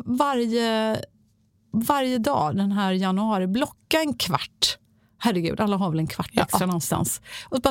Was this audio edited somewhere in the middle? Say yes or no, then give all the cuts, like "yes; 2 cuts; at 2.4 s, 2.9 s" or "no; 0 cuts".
no; 0 cuts